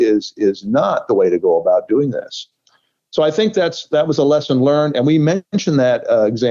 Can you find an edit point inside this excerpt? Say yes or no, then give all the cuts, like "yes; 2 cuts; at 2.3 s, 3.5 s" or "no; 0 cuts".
no; 0 cuts